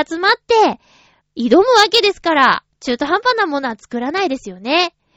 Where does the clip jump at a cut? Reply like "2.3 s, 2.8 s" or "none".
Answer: 1.2 s, 2.7 s